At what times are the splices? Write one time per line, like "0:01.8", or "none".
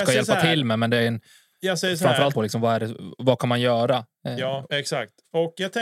0:02.3
0:04.7